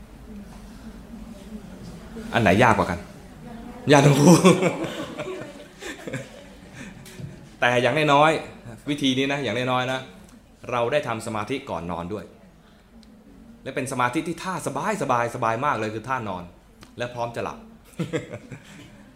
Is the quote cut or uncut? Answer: uncut